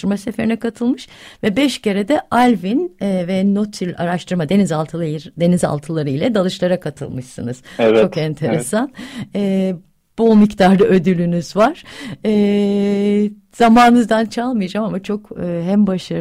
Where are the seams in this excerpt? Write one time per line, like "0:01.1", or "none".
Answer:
none

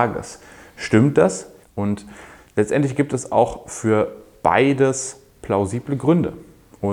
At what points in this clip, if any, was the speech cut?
0:01.6

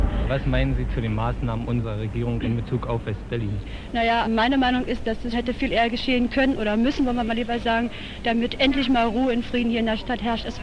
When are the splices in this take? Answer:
0:04.2
0:05.3

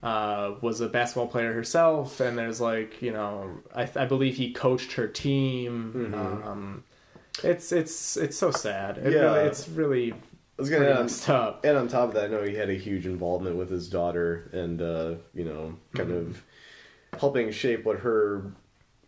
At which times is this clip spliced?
none

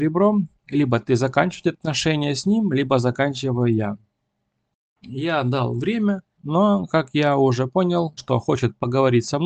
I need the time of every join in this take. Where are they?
0:06.3
0:08.2

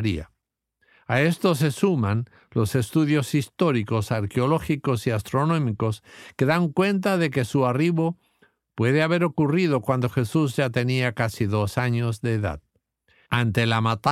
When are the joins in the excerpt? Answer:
none

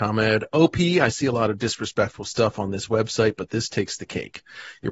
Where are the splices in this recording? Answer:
none

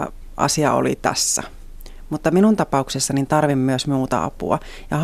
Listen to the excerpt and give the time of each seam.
none

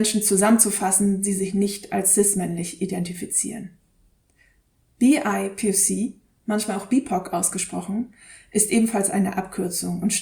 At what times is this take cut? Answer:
none

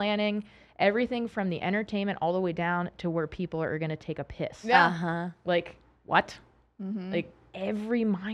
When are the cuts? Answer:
none

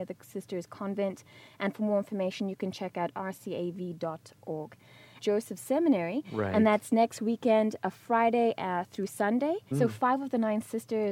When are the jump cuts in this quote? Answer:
0:05.2
0:09.7

